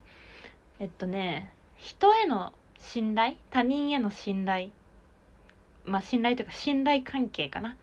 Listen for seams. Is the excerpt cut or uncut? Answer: uncut